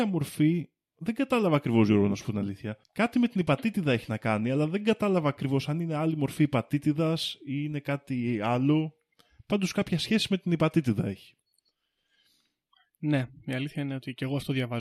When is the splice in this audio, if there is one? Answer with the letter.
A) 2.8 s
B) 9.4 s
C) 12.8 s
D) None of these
A